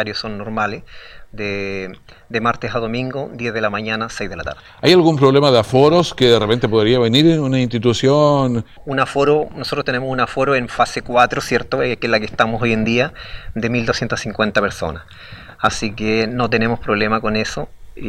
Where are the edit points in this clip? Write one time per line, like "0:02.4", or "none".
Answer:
0:08.8